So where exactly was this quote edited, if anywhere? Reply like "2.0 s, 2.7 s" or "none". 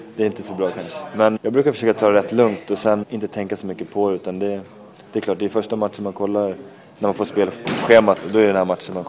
1.4 s, 3.0 s